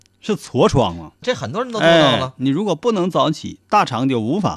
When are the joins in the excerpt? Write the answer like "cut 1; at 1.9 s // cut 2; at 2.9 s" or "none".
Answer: cut 1; at 1.2 s

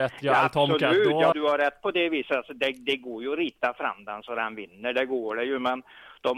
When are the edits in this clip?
cut 1; at 1.3 s

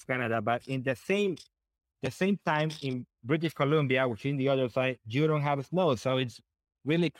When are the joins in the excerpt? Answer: none

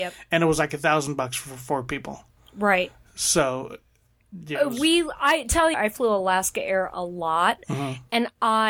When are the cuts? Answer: cut 1; at 5.7 s

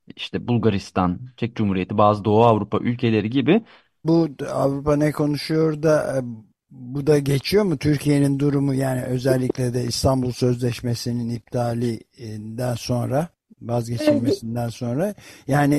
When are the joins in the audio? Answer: cut 1; at 4.0 s

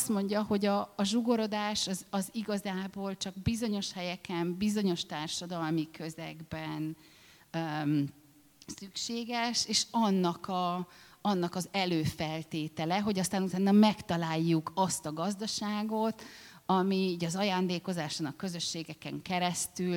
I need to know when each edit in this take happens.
none

